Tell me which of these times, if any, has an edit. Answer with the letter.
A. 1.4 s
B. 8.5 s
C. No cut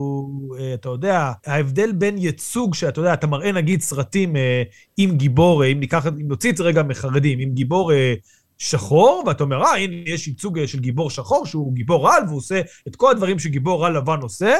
A